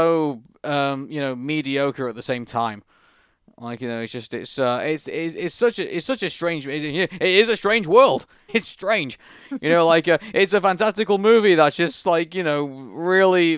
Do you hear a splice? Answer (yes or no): yes